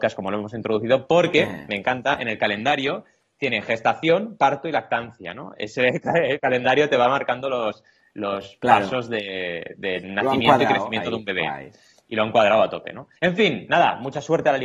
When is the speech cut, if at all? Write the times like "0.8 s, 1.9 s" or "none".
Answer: 13.2 s